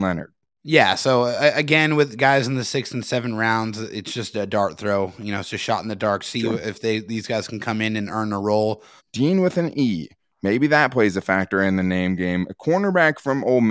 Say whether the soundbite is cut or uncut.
cut